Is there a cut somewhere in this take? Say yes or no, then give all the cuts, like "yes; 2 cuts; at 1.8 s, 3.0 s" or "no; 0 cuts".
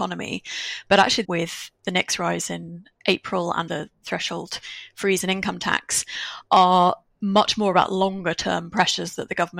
yes; 2 cuts; at 1.2 s, 3.7 s